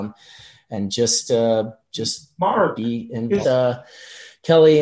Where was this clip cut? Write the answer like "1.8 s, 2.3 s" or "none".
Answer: 3.4 s